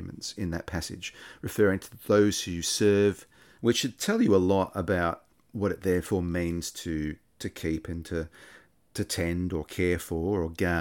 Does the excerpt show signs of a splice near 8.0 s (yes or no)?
no